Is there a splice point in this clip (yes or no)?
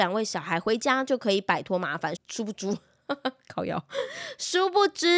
yes